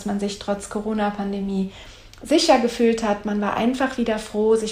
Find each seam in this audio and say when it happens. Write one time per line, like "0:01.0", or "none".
none